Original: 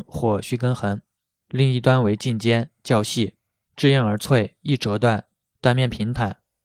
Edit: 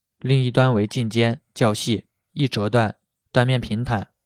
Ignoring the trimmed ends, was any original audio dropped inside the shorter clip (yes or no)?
yes